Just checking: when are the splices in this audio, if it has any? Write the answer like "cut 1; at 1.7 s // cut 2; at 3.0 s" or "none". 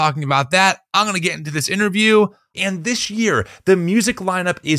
cut 1; at 2.5 s